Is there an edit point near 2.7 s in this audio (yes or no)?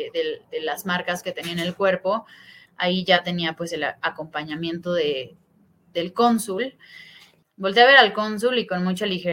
yes